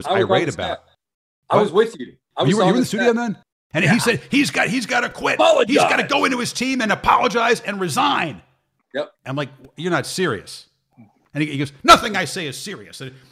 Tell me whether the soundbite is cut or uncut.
cut